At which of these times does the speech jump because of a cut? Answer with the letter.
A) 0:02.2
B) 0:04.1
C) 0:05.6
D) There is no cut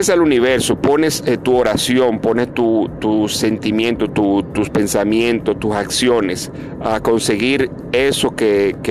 B